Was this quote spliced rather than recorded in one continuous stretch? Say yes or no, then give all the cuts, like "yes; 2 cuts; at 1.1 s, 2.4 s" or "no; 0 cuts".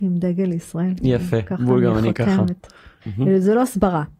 yes; 1 cut; at 3.0 s